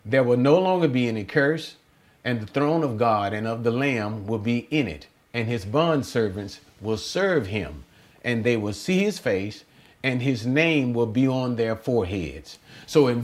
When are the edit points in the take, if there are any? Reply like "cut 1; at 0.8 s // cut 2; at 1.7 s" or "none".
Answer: none